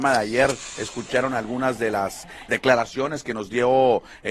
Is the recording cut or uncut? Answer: cut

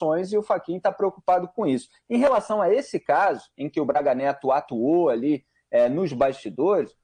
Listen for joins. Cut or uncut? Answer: uncut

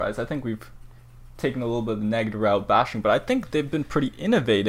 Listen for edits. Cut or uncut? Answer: uncut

